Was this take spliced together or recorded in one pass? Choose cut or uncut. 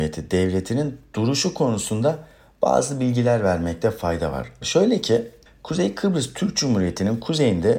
cut